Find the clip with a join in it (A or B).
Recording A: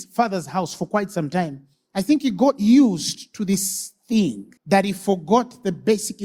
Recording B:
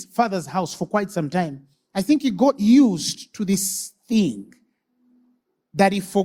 A